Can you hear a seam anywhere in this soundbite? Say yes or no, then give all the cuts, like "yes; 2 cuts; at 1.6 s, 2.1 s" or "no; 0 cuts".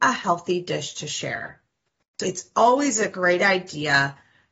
yes; 1 cut; at 2.2 s